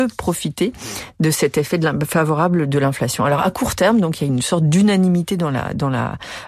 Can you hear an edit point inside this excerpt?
no; 0 cuts

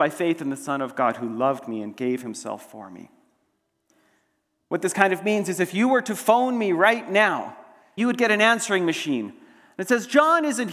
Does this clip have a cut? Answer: yes; 1 cut; at 8.0 s

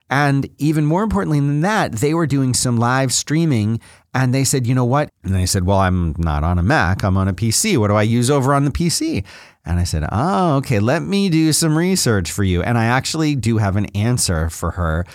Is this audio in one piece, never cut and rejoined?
no; 1 cut; at 5.1 s

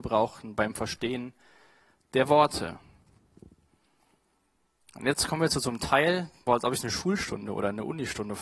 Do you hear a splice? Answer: yes; 1 cut; at 6.5 s

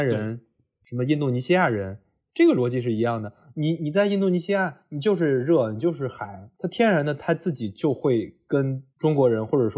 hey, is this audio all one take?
yes; 0 cuts

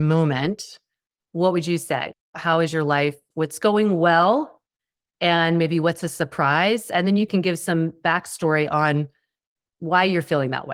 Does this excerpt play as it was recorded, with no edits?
yes; 0 cuts

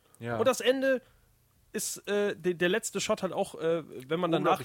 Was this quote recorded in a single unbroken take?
yes; 0 cuts

